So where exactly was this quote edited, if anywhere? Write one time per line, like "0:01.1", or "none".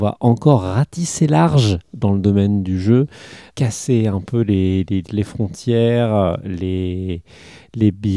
0:03.5
0:05.0